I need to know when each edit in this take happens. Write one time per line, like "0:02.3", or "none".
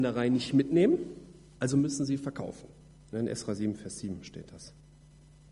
0:03.0